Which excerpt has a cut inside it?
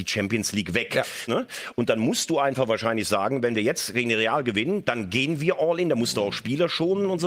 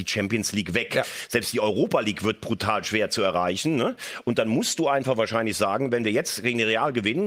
first; 1 cut; at 1.3 s

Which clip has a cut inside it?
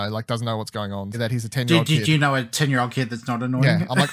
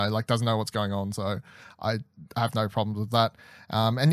first; 1 cut; at 1.1 s

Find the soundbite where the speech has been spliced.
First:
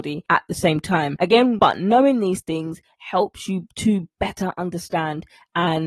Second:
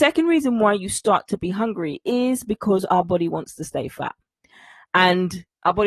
first; 1 cut; at 1.6 s

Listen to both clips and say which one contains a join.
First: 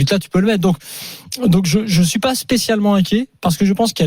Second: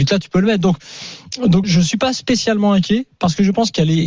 second; 1 cut; at 1.6 s

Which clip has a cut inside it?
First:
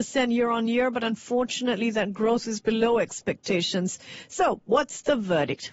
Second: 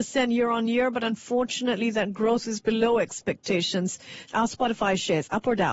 second; 1 cut; at 4.3 s

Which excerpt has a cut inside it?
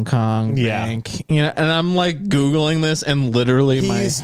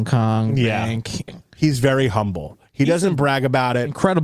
second; 1 cut; at 1.3 s

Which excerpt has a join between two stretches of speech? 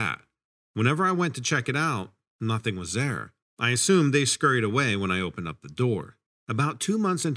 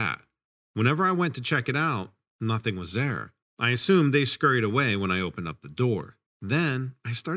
first; 1 cut; at 6.3 s

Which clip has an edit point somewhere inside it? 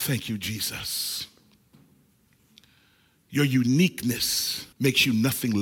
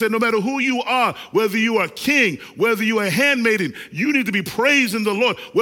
first; 1 cut; at 4.7 s

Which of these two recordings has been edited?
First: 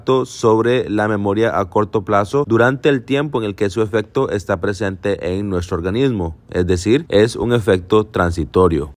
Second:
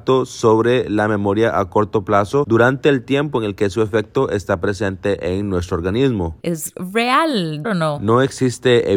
second; 2 cuts; at 6.4 s, 7.6 s

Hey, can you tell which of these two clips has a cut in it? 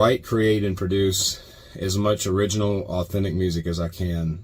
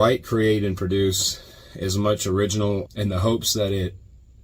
second; 1 cut; at 2.9 s

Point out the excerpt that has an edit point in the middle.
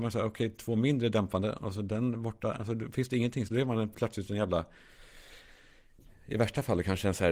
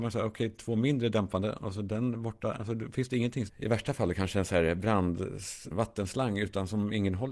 second; 2 cuts; at 3.5 s, 5.7 s

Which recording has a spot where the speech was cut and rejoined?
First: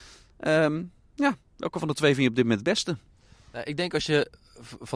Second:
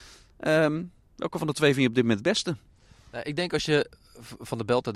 second; 1 cut; at 1.0 s

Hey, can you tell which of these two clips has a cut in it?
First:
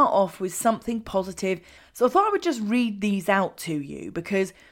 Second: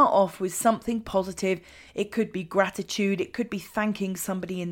first; 1 cut; at 1.8 s

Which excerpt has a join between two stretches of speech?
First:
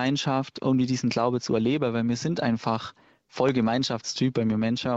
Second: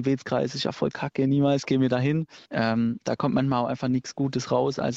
second; 1 cut; at 2.4 s

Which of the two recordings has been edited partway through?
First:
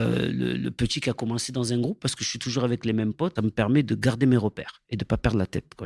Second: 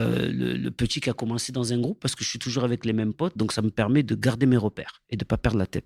first; 1 cut; at 3.4 s

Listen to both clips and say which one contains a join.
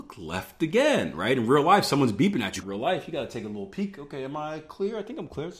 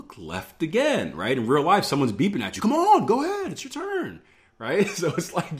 first; 1 cut; at 2.6 s

